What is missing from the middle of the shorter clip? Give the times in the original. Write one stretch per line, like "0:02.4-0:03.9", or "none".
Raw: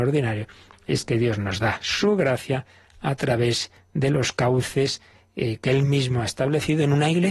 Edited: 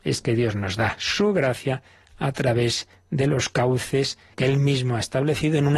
0:05.2-0:05.6